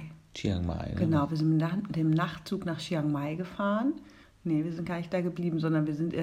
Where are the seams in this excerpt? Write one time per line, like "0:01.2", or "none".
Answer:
0:04.2